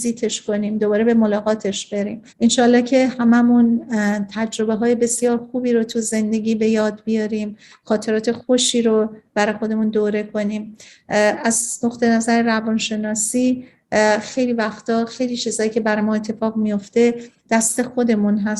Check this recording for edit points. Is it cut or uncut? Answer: cut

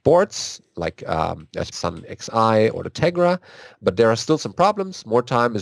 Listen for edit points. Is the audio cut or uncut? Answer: cut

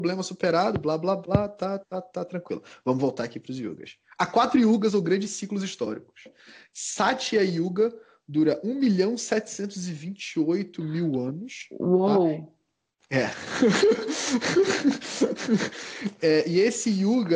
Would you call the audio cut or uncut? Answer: uncut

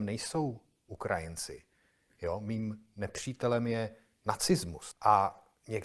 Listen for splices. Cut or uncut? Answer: uncut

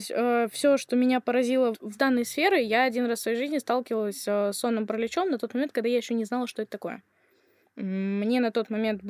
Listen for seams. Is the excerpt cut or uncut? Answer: cut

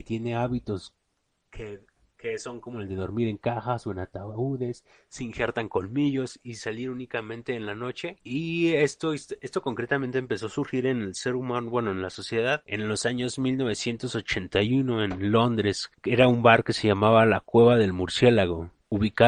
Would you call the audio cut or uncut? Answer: uncut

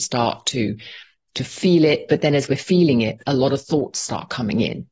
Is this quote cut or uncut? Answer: uncut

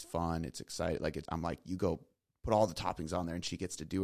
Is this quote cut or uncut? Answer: cut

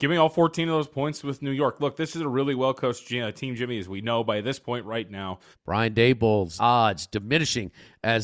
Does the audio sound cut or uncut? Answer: cut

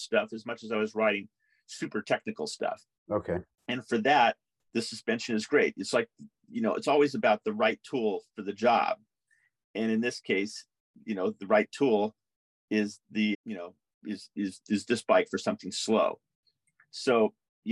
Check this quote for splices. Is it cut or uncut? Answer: cut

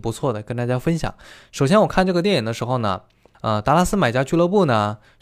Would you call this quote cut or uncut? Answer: cut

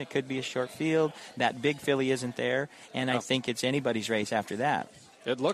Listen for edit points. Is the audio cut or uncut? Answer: uncut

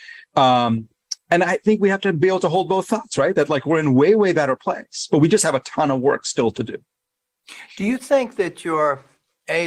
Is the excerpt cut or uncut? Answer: uncut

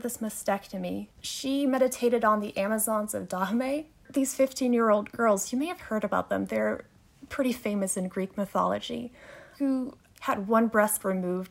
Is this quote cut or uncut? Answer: cut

